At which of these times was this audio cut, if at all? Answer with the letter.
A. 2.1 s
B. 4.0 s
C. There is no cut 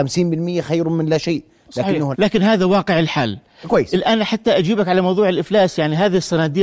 A